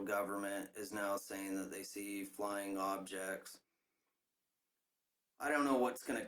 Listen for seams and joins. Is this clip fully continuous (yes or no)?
yes